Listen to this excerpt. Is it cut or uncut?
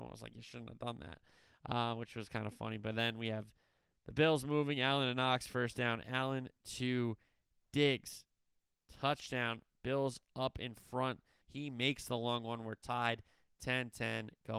cut